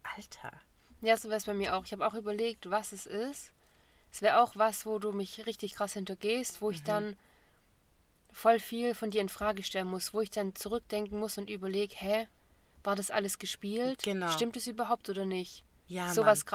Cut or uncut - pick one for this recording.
uncut